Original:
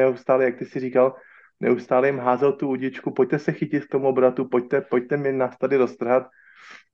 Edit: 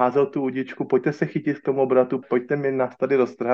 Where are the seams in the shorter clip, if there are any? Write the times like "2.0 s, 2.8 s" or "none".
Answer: 2.2 s

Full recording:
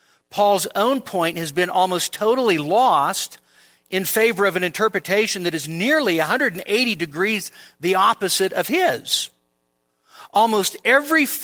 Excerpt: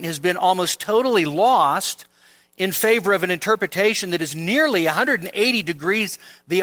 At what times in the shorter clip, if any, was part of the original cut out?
none

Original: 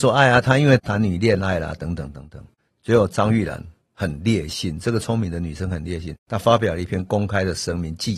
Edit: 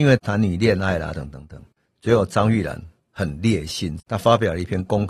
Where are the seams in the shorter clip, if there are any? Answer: 1.1 s, 4.0 s

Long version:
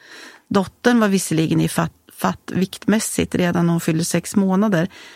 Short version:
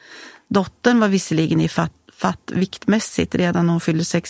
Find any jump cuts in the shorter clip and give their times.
none

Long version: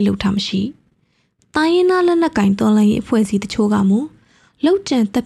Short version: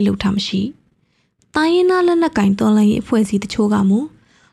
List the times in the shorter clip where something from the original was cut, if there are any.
none

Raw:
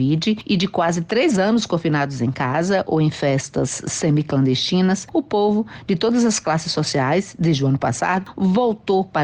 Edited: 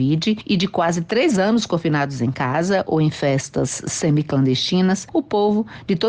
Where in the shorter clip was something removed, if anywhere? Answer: none

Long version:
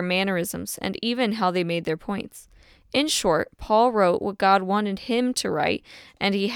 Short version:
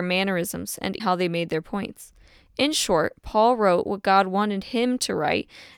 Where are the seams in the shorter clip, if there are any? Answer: 1.0 s

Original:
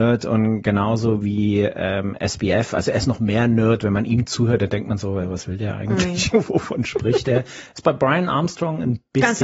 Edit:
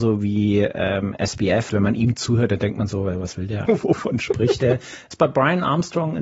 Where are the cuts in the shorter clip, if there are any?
1.7 s, 3.7 s

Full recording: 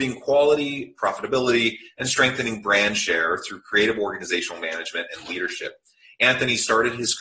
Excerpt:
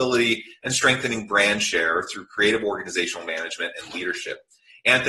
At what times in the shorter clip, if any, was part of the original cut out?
none

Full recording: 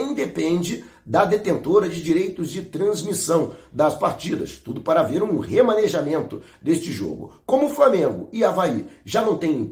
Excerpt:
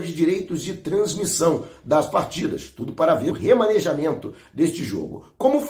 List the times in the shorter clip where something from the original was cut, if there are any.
3.3 s

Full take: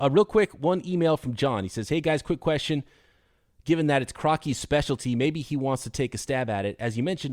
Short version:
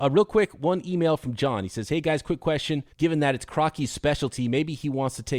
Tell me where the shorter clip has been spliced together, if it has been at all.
2.9 s

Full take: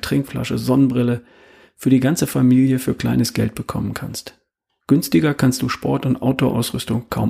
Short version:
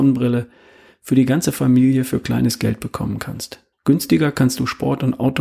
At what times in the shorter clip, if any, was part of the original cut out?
3.7 s

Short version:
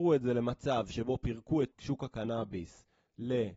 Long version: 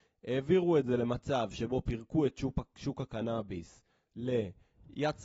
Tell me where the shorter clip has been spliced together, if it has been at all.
1.7 s

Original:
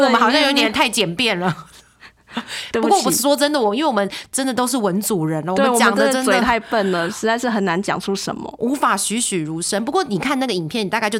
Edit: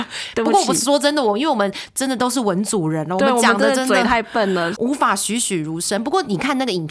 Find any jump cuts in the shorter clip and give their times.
4.8 s

